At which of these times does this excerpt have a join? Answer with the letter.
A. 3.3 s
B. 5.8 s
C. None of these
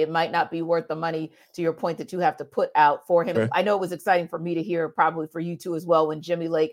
A